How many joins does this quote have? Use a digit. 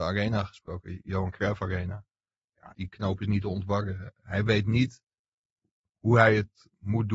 1